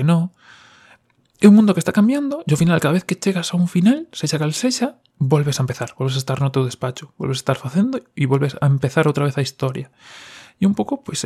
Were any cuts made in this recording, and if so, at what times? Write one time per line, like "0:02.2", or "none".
0:05.1